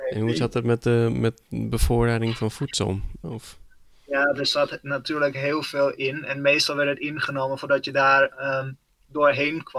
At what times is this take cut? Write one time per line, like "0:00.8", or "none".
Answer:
0:03.2